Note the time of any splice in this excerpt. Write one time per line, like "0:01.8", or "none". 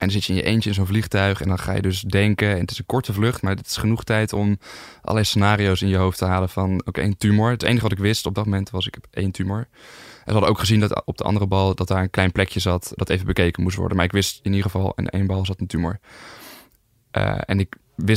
0:13.0